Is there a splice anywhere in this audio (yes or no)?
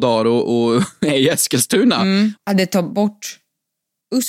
yes